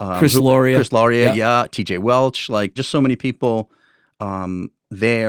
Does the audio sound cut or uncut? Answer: cut